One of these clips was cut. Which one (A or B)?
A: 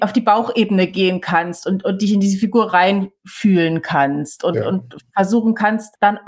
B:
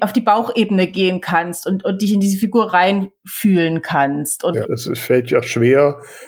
B